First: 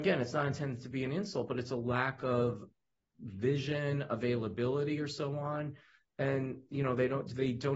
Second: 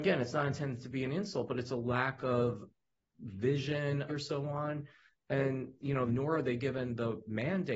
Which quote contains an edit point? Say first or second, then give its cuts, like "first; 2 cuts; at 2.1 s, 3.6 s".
second; 2 cuts; at 4.1 s, 6.1 s